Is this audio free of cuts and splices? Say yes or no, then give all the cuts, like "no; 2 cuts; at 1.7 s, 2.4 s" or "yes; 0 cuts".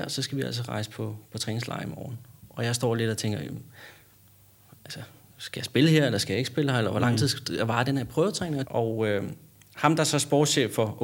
no; 1 cut; at 8.6 s